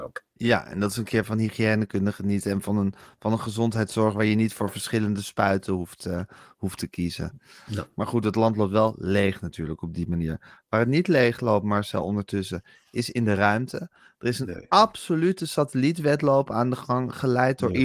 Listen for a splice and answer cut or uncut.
uncut